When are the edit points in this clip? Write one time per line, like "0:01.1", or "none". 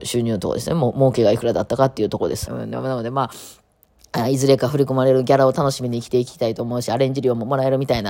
0:02.5